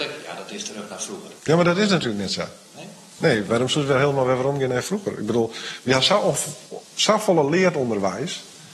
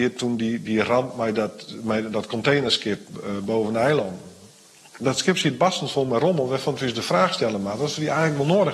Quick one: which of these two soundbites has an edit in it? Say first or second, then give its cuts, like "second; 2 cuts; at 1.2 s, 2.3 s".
first; 1 cut; at 1.4 s